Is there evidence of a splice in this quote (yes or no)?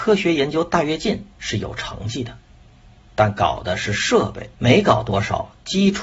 yes